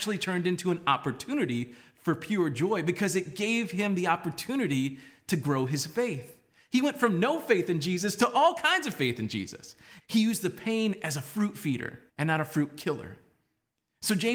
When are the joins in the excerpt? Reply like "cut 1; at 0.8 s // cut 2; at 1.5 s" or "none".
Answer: cut 1; at 10.0 s // cut 2; at 12.1 s